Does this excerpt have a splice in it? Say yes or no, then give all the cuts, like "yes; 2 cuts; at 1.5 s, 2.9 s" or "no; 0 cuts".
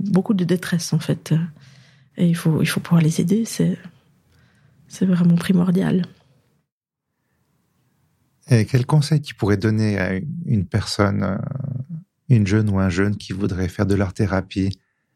no; 0 cuts